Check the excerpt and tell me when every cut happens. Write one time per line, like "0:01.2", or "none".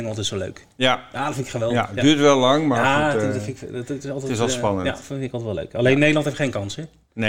none

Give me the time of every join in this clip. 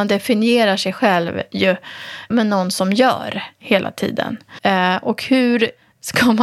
0:02.3
0:04.6

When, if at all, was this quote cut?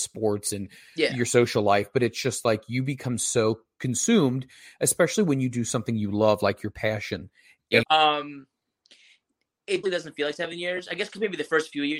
0:07.8
0:09.8

